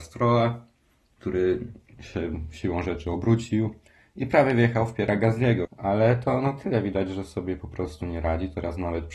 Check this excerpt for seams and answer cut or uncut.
cut